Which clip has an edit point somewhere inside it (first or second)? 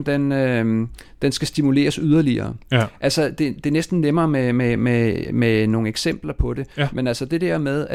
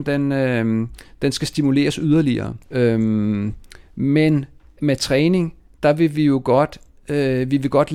second